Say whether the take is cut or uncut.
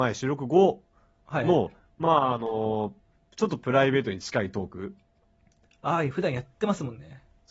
uncut